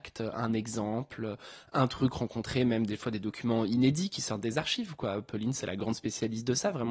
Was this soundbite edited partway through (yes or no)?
no